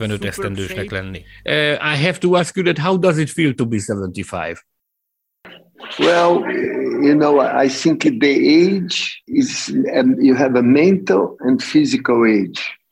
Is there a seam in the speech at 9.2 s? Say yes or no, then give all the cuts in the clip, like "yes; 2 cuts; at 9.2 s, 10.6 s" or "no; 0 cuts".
yes; 1 cut; at 9.2 s